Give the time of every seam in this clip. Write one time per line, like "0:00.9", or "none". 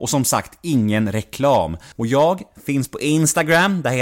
0:01.9